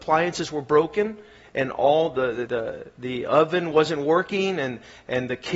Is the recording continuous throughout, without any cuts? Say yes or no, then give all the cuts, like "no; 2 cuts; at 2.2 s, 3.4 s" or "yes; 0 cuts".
no; 1 cut; at 2.5 s